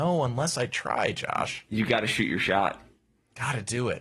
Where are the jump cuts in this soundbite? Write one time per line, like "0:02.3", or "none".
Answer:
none